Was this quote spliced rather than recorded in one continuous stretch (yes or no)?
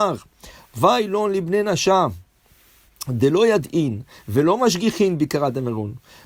no